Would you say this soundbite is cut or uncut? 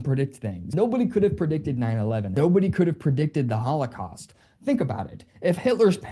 uncut